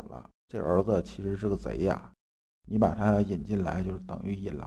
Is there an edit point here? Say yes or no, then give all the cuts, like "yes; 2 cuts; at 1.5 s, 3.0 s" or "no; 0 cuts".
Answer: no; 0 cuts